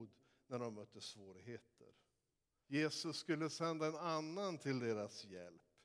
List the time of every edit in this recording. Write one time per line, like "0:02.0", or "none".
0:02.6